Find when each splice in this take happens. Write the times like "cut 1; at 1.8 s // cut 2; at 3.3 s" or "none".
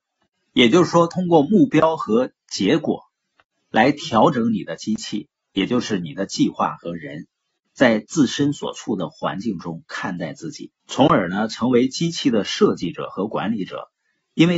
cut 1; at 7.7 s // cut 2; at 10.8 s